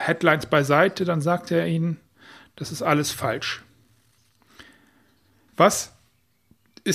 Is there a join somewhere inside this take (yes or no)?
yes